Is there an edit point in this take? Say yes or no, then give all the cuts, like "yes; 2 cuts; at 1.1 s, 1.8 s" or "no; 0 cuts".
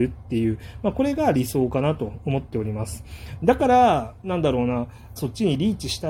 yes; 2 cuts; at 3.4 s, 5.2 s